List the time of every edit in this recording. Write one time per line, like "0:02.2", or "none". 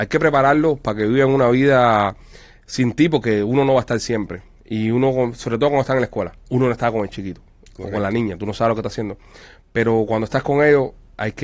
0:06.5

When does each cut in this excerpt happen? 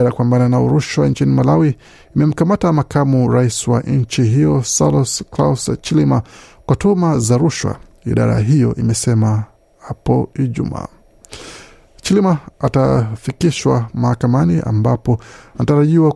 none

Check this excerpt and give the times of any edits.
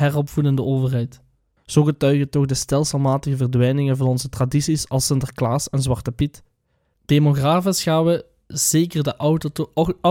0:01.6
0:06.9

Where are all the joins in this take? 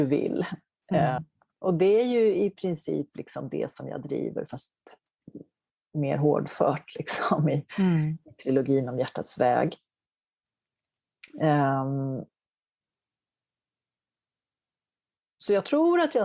none

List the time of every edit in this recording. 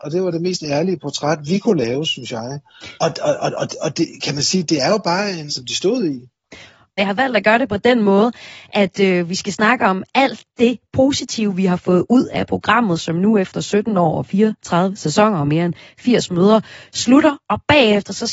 0:03.0
0:05.5
0:07.0

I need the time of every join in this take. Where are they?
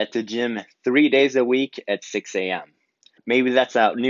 0:03.2

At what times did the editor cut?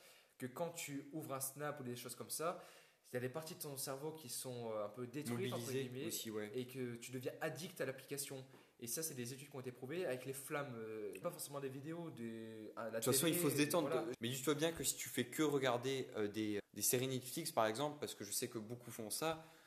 0:11.2
0:14.1
0:16.6

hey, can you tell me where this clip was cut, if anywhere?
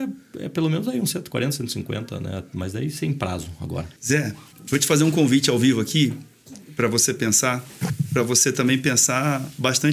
0:04.0

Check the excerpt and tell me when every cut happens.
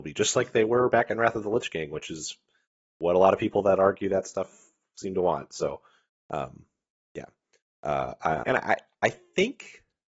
0:08.4

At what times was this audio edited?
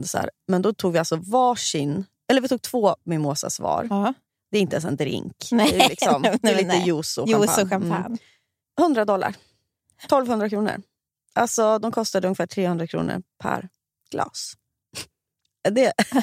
none

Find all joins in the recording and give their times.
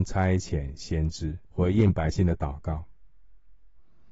0:01.4

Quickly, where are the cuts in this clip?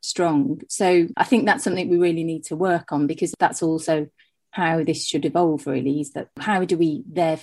none

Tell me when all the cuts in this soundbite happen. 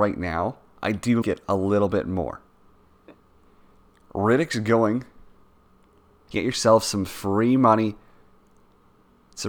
0:01.2
0:06.3

